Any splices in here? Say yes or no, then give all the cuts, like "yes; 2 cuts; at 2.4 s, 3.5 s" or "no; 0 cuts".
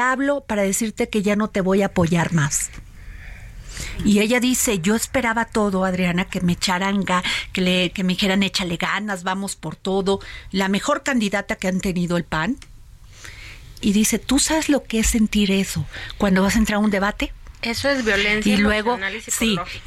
yes; 1 cut; at 13.8 s